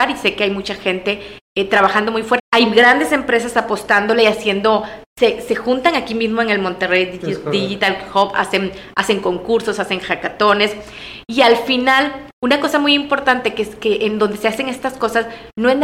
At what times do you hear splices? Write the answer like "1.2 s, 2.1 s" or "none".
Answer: 2.4 s